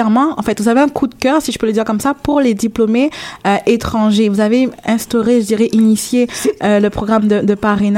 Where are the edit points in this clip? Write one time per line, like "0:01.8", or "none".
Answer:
none